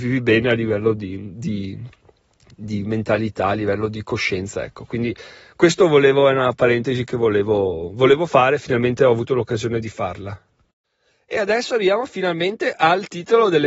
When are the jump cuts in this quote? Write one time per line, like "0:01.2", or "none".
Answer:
none